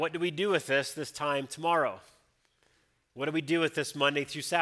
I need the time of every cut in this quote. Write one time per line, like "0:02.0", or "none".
none